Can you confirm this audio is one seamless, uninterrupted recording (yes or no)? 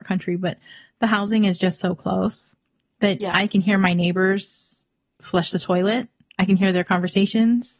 yes